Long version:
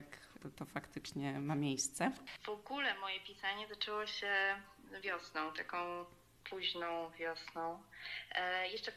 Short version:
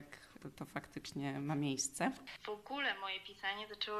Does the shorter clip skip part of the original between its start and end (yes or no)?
no